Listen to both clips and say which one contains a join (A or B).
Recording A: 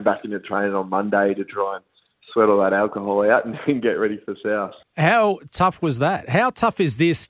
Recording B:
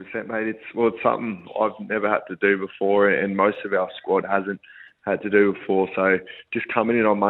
A